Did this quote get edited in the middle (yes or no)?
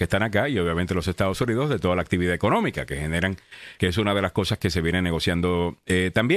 yes